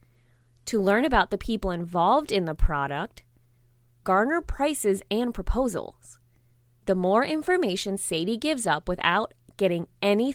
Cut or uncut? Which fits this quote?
cut